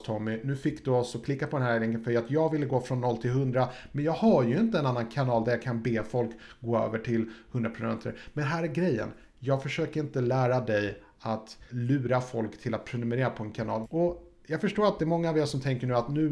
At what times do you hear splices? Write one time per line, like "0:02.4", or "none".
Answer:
0:11.7
0:13.8